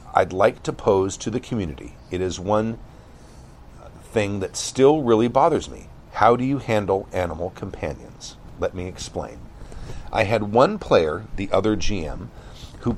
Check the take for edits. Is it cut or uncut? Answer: uncut